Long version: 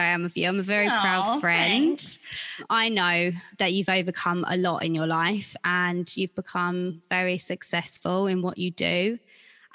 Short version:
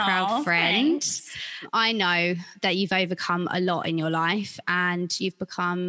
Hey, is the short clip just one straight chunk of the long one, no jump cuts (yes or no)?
yes